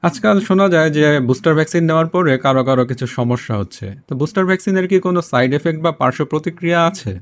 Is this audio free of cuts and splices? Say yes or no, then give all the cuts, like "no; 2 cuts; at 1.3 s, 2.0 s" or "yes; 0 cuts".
yes; 0 cuts